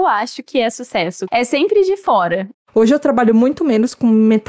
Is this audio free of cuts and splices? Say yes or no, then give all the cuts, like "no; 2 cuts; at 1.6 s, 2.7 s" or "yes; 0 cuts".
no; 2 cuts; at 1.3 s, 2.5 s